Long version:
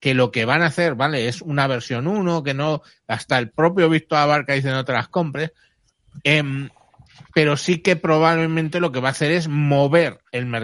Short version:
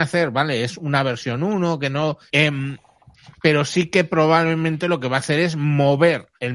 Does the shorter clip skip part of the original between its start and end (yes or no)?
yes